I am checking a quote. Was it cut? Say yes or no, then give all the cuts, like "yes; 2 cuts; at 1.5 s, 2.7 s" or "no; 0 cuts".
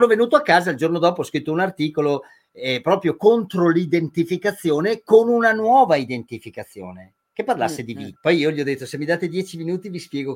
yes; 1 cut; at 8.2 s